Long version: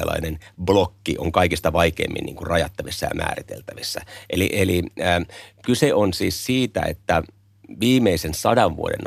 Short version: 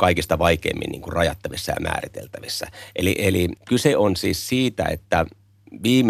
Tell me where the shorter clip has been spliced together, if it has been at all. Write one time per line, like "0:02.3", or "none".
0:03.6